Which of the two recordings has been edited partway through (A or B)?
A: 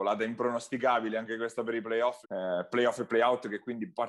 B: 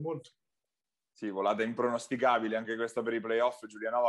A